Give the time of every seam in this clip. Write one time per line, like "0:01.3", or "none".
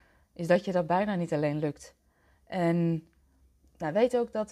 none